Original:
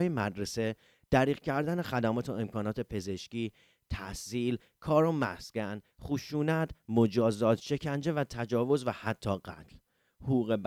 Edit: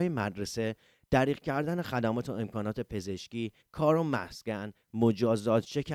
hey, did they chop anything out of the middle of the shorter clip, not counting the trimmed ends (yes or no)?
yes